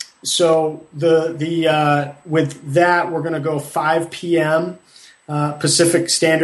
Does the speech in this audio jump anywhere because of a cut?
no; 0 cuts

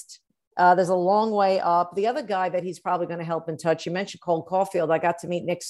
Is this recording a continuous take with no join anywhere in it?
yes; 0 cuts

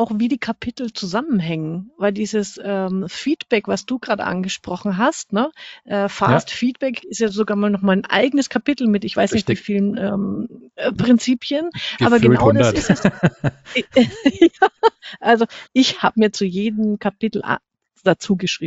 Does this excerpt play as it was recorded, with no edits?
no; 1 cut; at 15.7 s

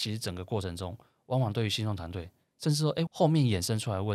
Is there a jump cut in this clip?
yes; 1 cut; at 3.1 s

